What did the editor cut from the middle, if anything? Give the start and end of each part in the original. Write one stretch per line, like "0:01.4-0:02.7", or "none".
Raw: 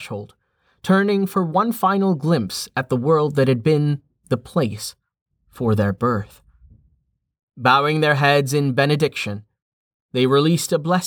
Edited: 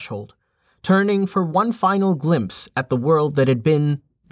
none